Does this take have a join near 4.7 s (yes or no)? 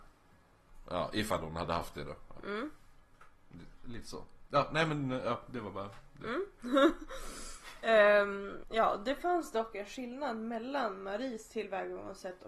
no